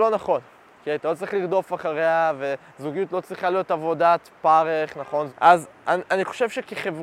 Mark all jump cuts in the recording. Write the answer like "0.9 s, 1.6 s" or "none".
5.3 s